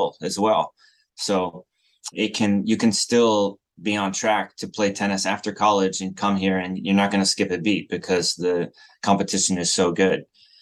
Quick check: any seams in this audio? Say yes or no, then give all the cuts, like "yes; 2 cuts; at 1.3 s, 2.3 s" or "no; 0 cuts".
yes; 1 cut; at 2.1 s